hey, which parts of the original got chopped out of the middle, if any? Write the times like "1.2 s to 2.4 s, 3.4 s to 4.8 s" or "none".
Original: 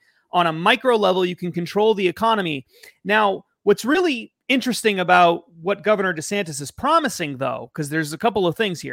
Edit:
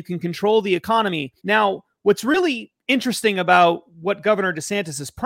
2.7 s to 3.0 s